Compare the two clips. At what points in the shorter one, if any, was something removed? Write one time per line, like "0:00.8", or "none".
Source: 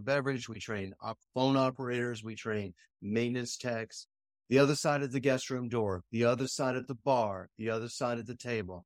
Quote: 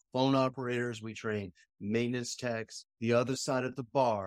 0:03.0

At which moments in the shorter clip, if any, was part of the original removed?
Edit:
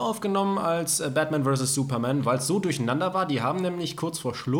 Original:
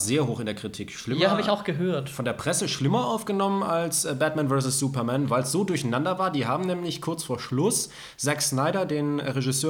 none

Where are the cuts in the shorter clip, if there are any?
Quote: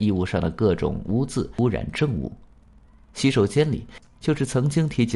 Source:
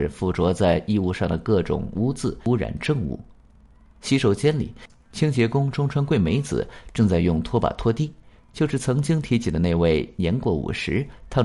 0:04.1

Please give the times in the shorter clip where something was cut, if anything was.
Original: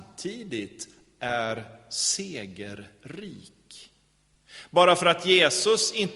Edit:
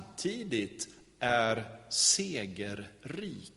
none

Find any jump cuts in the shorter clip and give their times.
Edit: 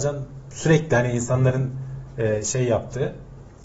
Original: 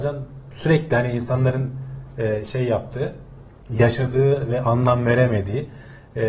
none

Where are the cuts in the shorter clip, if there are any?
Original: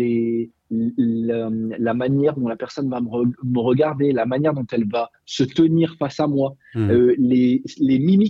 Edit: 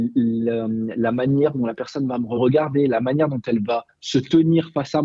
0:02.4

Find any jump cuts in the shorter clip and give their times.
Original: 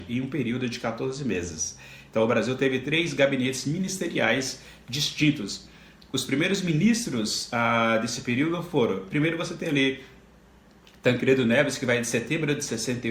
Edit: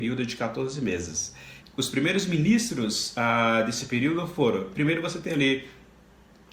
0:01.6

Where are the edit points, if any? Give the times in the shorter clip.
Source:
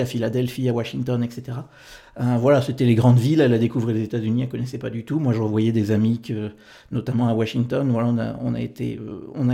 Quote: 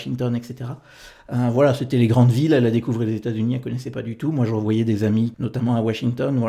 0:05.3

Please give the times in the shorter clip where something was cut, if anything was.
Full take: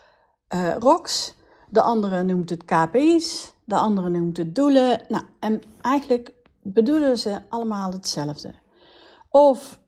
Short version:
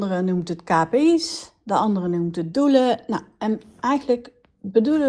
none

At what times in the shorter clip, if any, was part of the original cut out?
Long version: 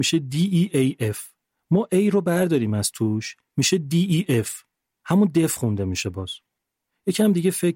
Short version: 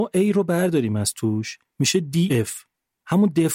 0:02.3

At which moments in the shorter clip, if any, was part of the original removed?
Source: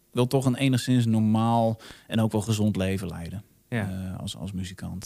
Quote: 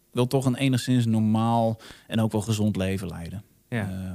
none

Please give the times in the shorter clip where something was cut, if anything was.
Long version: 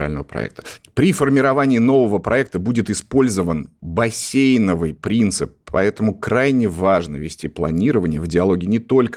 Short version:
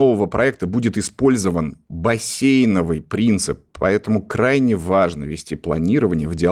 none

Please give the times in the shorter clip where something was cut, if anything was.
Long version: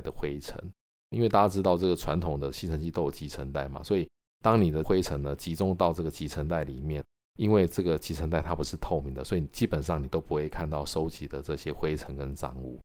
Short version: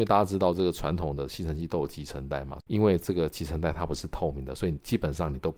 0:02.6

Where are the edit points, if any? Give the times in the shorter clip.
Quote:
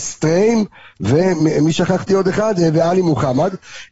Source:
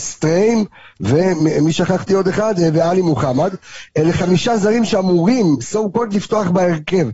none

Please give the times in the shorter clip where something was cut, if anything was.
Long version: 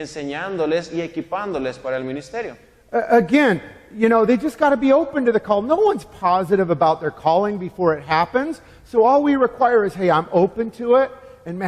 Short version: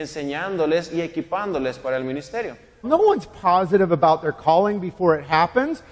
0:02.8

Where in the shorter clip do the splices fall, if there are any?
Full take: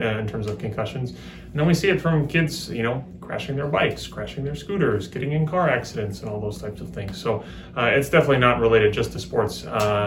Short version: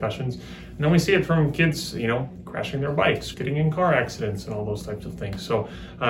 0:03.3

